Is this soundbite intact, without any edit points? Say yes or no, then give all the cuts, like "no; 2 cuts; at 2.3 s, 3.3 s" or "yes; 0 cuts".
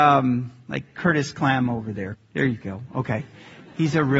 no; 1 cut; at 2.2 s